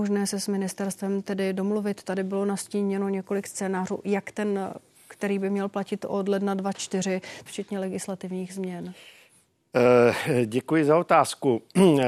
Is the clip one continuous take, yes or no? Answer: no